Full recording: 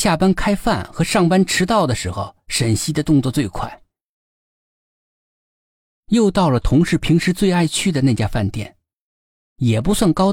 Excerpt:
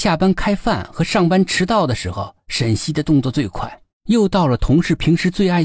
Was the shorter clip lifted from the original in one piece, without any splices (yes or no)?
no